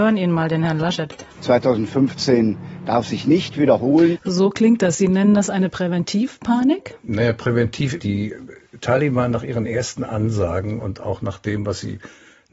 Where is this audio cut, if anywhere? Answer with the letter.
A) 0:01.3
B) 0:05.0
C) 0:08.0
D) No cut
C